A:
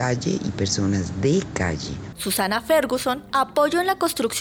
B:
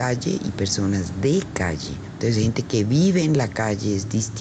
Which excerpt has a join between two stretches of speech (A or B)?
A